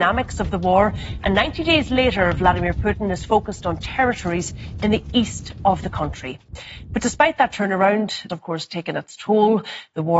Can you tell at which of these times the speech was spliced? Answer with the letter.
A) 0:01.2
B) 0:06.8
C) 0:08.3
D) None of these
C